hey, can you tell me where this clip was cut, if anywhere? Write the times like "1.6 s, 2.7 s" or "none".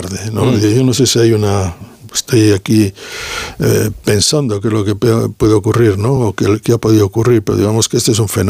none